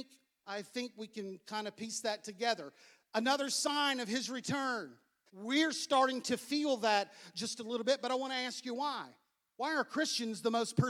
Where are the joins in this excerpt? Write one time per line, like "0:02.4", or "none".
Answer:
0:05.3